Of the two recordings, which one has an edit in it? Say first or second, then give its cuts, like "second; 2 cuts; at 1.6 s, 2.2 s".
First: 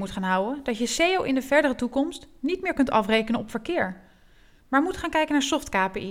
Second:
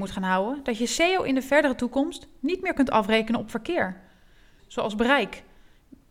second; 1 cut; at 4.6 s